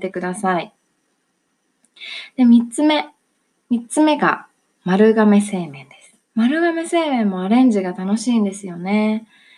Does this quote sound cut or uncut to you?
cut